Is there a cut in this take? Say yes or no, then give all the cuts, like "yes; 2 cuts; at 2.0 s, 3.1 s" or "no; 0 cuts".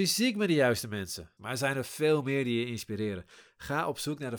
yes; 1 cut; at 1.4 s